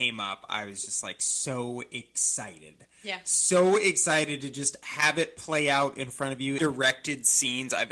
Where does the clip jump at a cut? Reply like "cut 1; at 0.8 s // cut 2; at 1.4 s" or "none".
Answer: cut 1; at 6.6 s